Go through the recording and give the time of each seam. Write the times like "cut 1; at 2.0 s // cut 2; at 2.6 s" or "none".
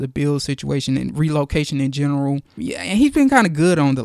cut 1; at 2.6 s